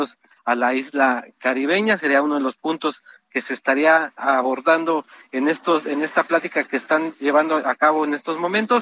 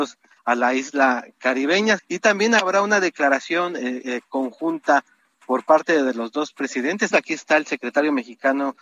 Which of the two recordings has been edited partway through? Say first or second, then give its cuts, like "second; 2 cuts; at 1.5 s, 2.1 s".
second; 2 cuts; at 2.0 s, 7.1 s